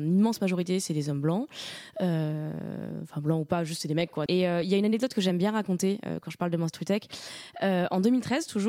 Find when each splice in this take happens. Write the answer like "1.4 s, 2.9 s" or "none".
4.3 s